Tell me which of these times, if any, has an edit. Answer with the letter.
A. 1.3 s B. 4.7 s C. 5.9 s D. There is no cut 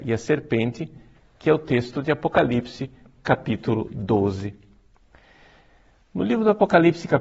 D